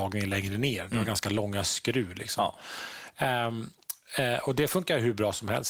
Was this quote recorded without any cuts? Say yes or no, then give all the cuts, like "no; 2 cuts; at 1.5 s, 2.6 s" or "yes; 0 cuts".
yes; 0 cuts